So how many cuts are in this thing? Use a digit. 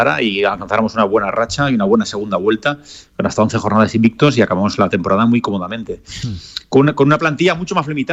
0